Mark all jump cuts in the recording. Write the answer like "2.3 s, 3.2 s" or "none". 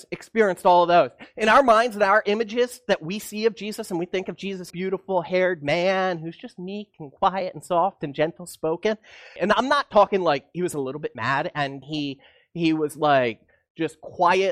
4.7 s, 9.4 s, 11.8 s

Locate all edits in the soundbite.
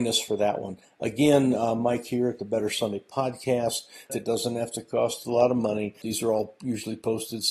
4.1 s, 6.0 s

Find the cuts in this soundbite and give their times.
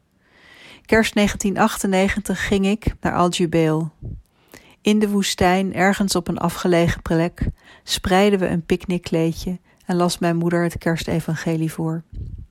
3.0 s

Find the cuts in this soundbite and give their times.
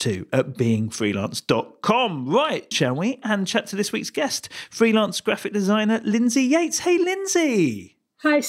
2.7 s

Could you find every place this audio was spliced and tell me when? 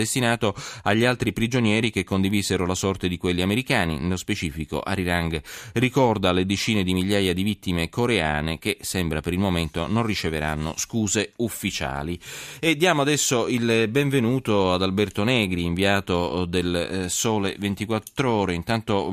none

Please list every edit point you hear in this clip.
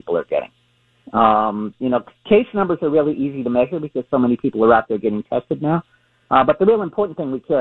none

